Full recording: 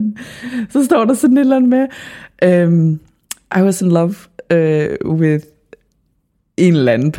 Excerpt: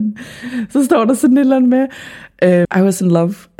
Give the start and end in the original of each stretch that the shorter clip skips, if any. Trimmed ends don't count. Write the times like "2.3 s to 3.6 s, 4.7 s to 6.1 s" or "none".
2.7 s to 3.5 s